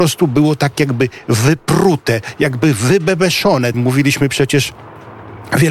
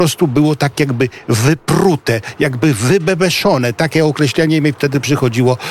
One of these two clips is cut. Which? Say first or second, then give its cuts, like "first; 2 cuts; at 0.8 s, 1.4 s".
first; 1 cut; at 3.7 s